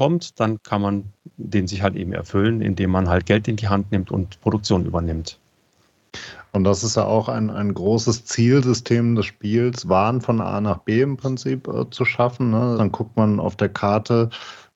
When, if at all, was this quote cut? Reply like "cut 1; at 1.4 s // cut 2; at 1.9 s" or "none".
cut 1; at 12.8 s